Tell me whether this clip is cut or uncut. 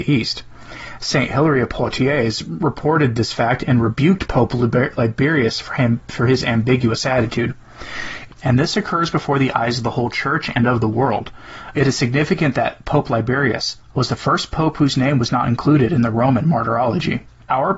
cut